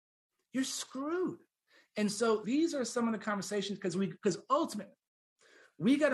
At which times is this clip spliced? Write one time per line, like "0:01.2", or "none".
0:02.4